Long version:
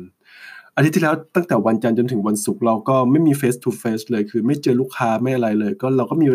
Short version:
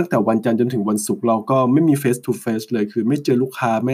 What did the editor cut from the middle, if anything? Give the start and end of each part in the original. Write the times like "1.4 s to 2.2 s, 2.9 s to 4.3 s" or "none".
none